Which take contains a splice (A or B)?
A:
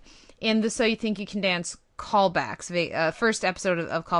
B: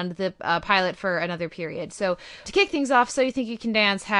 B